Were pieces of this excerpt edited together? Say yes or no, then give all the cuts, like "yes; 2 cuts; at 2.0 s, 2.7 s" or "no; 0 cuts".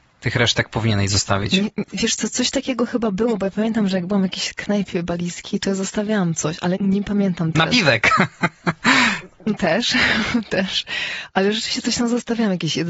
yes; 1 cut; at 6.8 s